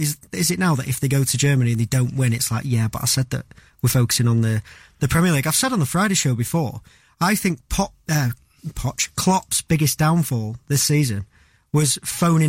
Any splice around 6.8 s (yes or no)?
no